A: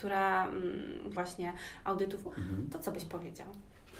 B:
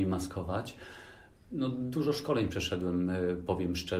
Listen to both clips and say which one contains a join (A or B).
A